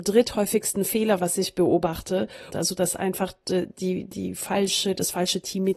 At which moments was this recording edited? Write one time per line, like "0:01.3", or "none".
0:02.5

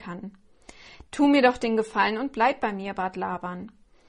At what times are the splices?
0:01.1

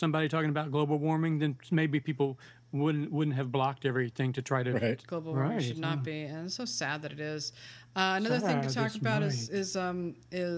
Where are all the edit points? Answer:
0:05.0

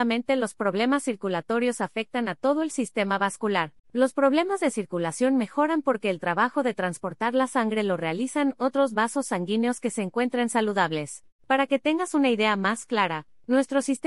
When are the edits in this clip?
0:03.8
0:11.3

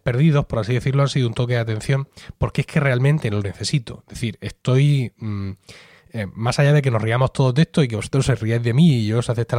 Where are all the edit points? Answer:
none

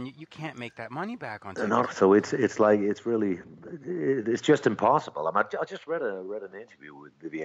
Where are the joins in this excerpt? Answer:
0:01.8

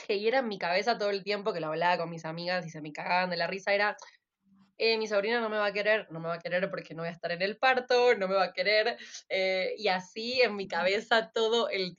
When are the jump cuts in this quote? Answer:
none

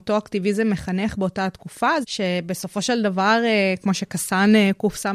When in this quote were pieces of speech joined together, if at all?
0:02.0

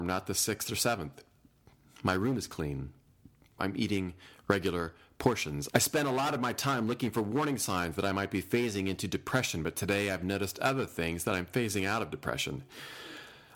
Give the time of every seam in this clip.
0:03.6
0:05.7

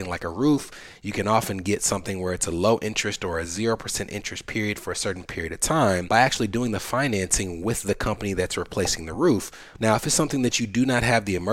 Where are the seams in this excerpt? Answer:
0:09.8

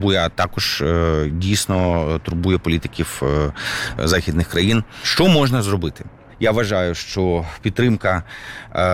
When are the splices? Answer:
0:04.0

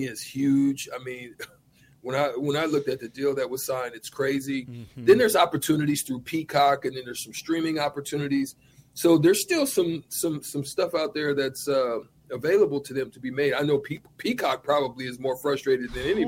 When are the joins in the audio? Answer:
none

